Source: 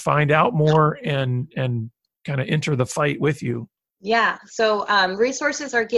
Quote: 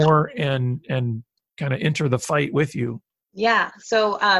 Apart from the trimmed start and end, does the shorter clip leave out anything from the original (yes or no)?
no